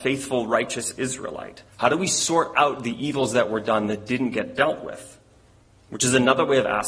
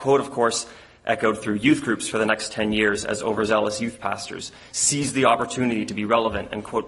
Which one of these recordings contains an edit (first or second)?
first